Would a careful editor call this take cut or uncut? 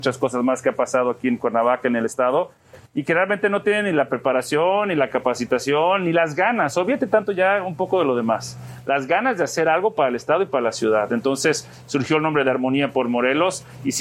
uncut